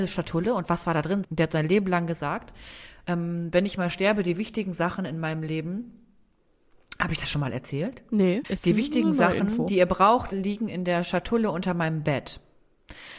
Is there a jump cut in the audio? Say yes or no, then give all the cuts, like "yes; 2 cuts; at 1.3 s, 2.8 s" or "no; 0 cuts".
yes; 3 cuts; at 1.2 s, 8.4 s, 10.3 s